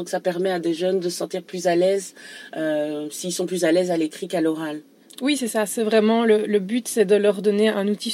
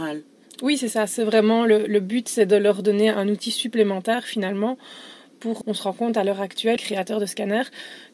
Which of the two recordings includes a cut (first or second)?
second